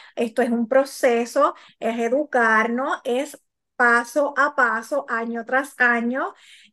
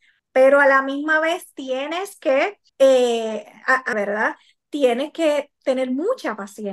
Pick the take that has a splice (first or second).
second